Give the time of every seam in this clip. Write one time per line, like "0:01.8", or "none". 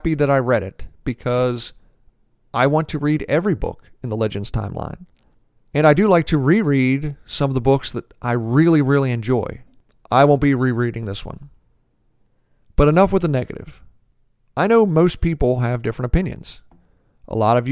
none